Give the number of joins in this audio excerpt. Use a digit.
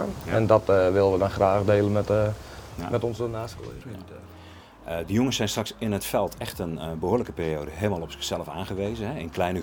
0